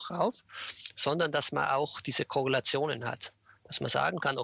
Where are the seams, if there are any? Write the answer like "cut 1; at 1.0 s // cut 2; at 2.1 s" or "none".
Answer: none

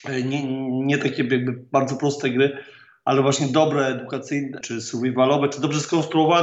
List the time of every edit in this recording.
cut 1; at 4.6 s

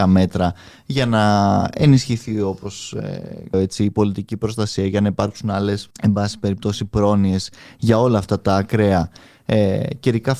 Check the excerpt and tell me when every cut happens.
cut 1; at 3.5 s // cut 2; at 5.9 s

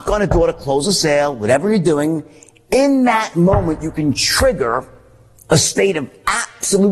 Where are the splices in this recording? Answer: none

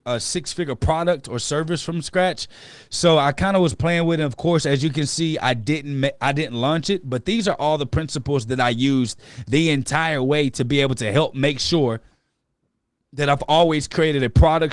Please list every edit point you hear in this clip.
none

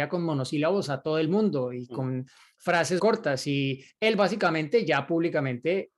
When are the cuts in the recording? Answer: cut 1; at 3.0 s

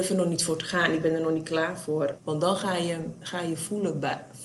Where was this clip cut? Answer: cut 1; at 2.2 s

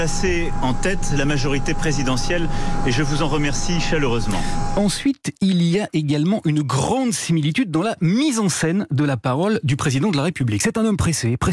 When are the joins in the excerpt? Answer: none

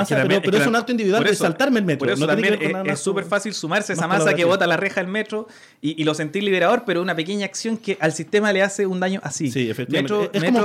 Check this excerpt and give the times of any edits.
none

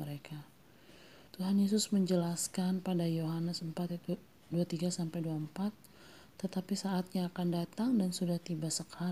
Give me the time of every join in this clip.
cut 1; at 1.3 s

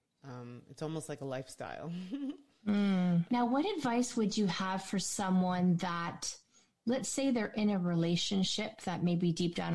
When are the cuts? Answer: cut 1; at 3.3 s

